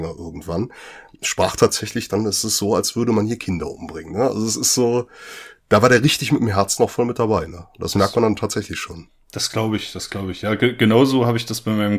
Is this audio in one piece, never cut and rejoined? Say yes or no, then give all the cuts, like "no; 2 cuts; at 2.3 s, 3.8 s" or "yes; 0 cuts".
yes; 0 cuts